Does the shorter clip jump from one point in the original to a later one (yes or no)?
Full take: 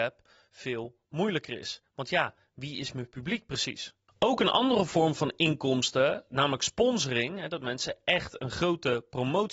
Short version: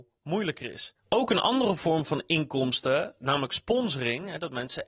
yes